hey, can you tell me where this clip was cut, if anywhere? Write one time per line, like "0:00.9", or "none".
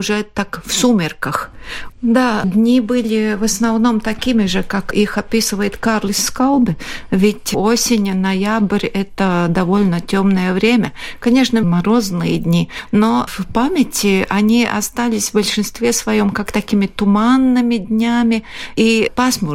0:01.9
0:11.6
0:13.3